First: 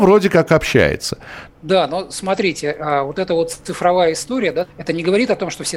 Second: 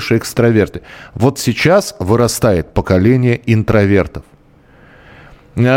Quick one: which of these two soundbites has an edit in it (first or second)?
first